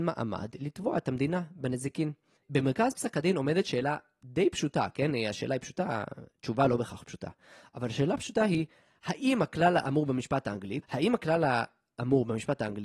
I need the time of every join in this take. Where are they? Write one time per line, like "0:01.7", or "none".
0:10.8

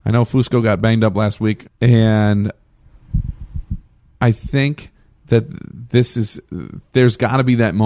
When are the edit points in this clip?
0:01.7

